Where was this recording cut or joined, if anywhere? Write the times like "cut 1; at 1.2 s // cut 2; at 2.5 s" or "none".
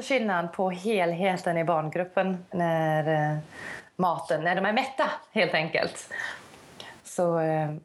cut 1; at 2.5 s